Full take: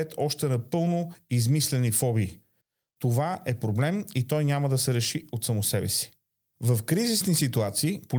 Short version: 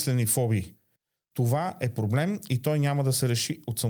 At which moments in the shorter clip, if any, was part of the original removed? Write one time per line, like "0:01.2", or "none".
none

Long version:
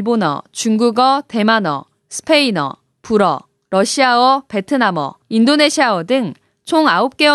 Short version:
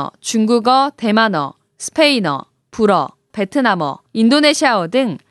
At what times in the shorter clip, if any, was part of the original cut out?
0:03.3

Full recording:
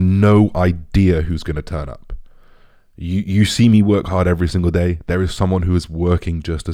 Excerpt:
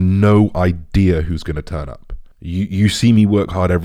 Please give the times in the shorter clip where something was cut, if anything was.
0:02.3

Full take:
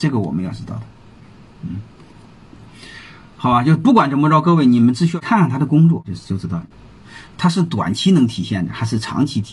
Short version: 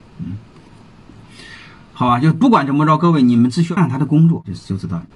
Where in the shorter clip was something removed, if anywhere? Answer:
0:03.8

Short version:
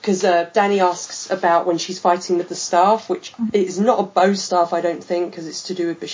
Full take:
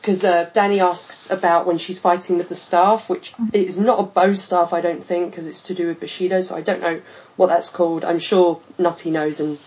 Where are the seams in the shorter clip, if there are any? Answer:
none

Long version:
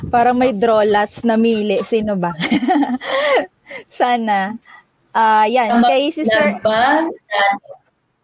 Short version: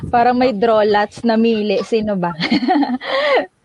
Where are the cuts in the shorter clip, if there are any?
none

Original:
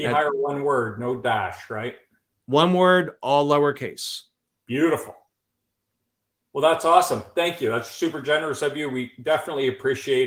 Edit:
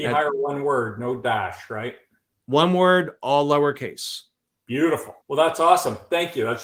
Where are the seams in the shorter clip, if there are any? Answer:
0:05.2

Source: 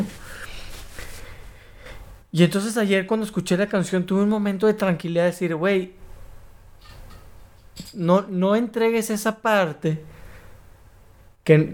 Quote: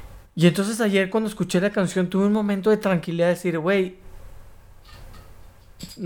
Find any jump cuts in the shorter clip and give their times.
none

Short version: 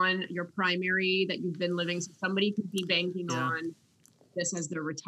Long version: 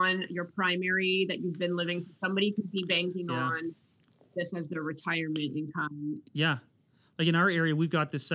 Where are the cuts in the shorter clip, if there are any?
none

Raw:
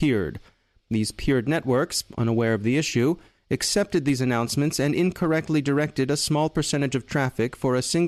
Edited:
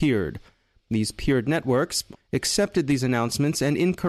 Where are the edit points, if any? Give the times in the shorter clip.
0:02.2

